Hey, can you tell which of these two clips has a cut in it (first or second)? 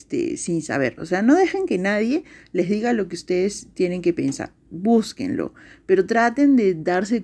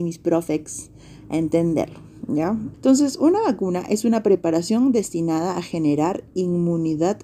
second